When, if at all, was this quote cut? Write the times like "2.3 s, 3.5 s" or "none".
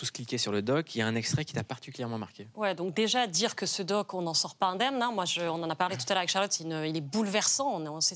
none

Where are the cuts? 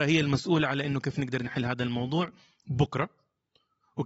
none

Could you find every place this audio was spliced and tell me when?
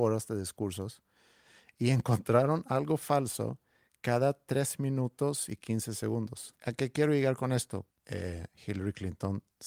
6.5 s, 7.9 s

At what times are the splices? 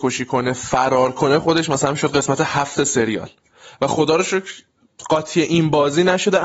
none

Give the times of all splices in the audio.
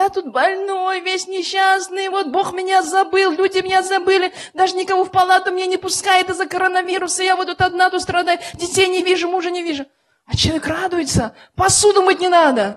none

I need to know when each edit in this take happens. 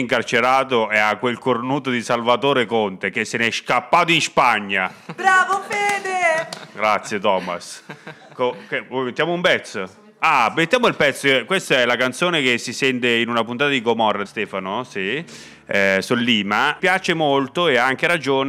14.2 s, 16.8 s

